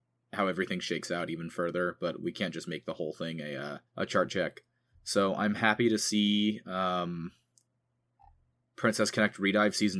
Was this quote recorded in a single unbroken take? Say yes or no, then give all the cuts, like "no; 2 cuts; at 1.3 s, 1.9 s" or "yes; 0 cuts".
no; 1 cut; at 3.9 s